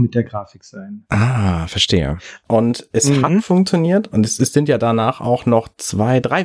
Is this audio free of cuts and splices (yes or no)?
no